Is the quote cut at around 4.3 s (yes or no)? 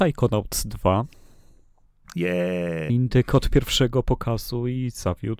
no